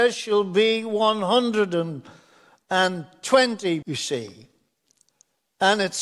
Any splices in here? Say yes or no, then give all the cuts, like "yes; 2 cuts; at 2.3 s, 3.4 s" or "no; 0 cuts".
yes; 1 cut; at 3.8 s